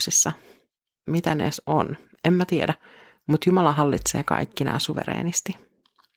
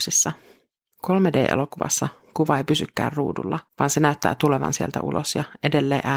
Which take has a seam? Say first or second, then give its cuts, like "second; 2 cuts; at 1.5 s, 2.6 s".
second; 2 cuts; at 0.9 s, 3.7 s